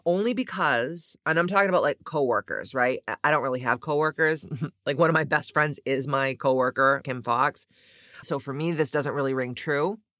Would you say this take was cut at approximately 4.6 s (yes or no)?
no